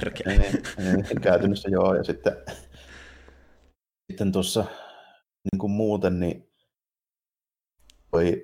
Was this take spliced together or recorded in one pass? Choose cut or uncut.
uncut